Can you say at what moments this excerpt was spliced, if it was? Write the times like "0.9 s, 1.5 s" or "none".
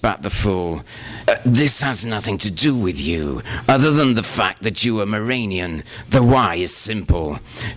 1.2 s